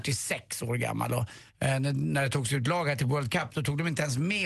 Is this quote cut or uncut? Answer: uncut